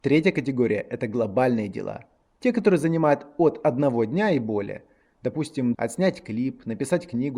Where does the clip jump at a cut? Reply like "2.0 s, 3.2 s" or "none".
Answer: 5.7 s